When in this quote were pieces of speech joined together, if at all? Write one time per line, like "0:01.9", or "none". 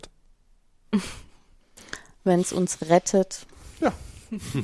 none